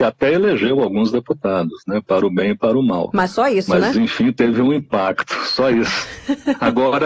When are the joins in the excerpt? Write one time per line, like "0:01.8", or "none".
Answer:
none